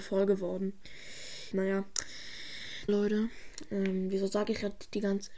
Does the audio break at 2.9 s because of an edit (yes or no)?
yes